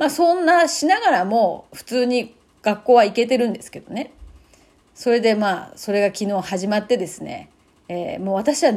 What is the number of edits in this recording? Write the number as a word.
zero